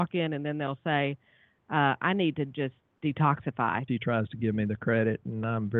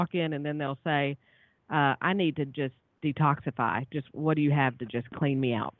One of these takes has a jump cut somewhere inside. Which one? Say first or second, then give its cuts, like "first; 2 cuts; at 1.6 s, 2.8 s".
first; 1 cut; at 3.9 s